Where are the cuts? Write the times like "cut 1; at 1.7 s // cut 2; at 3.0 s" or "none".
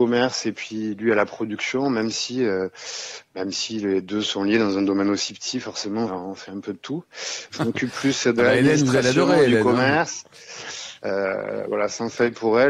cut 1; at 6.1 s // cut 2; at 7.5 s // cut 3; at 11.0 s